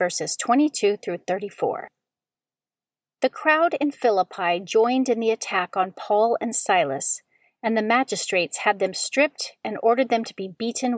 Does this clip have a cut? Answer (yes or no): no